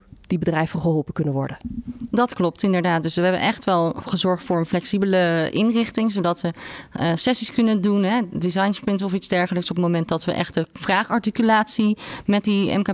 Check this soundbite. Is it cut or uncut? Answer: uncut